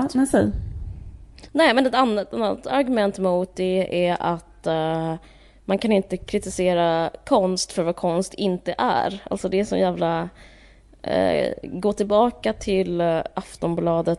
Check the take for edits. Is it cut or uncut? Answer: uncut